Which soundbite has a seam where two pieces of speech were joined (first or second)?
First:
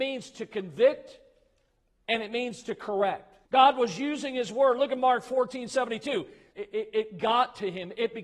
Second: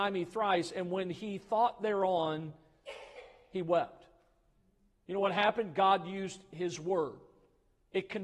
first